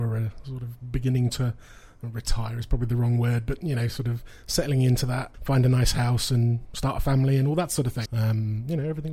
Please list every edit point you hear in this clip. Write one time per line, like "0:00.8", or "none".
0:05.3
0:08.1